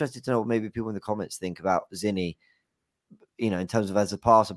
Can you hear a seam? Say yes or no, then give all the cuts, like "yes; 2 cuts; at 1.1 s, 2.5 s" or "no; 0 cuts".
no; 0 cuts